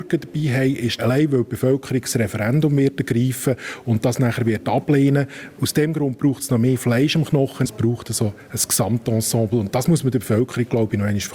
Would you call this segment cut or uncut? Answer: cut